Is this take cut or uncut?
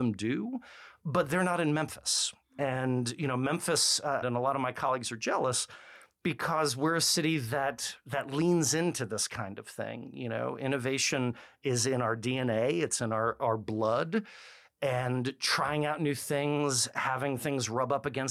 cut